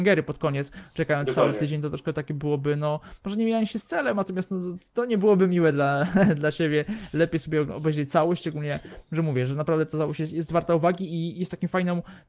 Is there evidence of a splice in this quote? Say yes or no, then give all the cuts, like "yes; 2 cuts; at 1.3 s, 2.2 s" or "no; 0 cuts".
no; 0 cuts